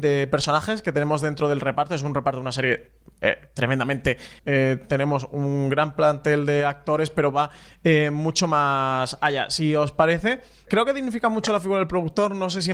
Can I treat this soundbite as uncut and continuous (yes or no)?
no